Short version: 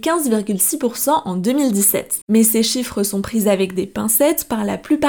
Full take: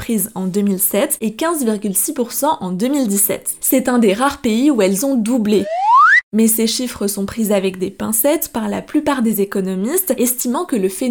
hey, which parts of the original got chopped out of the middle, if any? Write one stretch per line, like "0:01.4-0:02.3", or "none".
0:03.6-0:06.3